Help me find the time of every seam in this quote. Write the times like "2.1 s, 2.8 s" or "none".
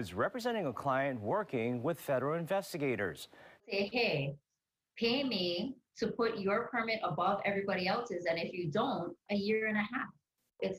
3.6 s, 9.3 s